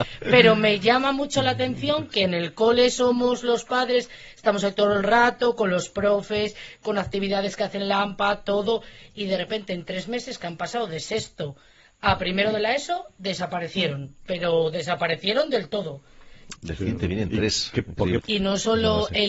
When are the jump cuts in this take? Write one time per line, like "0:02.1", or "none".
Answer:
0:16.5
0:18.2